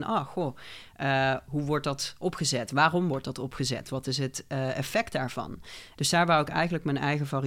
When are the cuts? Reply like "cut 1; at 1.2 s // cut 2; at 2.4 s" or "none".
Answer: cut 1; at 6.0 s